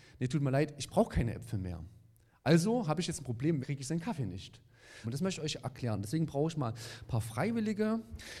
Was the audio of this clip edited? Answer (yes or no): yes